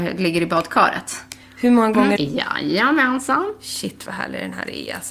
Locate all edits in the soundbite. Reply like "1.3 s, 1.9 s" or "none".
2.2 s

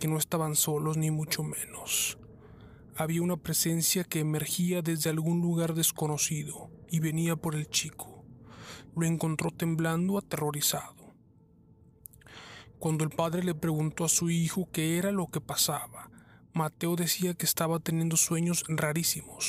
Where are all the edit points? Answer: 8.9 s

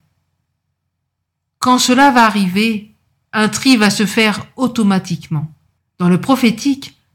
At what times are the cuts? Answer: 5.8 s

